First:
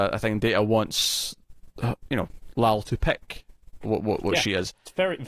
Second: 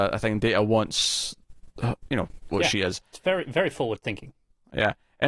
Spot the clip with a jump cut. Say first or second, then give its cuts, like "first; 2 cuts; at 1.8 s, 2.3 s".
second; 1 cut; at 2.5 s